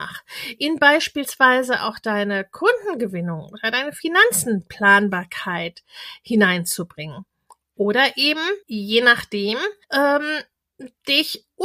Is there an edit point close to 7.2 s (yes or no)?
no